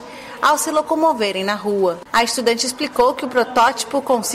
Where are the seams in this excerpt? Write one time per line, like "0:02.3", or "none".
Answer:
0:02.0